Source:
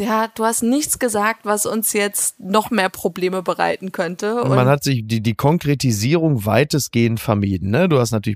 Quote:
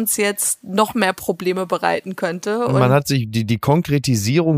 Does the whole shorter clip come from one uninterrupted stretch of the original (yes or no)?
yes